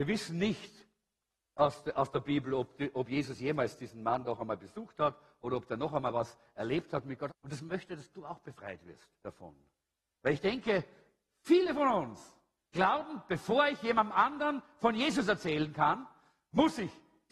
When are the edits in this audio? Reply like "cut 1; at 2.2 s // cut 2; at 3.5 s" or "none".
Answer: cut 1; at 7.3 s // cut 2; at 9.2 s